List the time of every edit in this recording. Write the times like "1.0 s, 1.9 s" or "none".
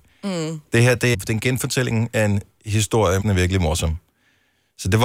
1.1 s, 3.2 s